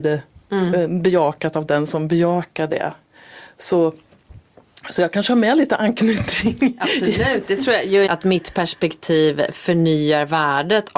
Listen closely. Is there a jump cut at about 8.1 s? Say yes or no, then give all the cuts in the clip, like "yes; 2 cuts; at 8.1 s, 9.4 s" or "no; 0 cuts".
yes; 1 cut; at 8.1 s